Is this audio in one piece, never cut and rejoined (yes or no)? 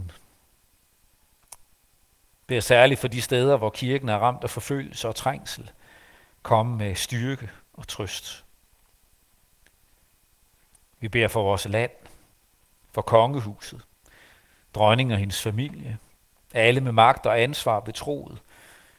yes